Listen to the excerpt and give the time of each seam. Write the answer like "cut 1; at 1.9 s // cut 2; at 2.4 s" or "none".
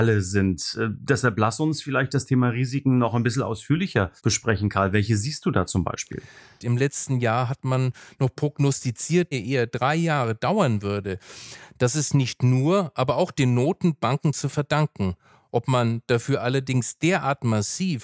cut 1; at 4.2 s // cut 2; at 6.6 s // cut 3; at 9.3 s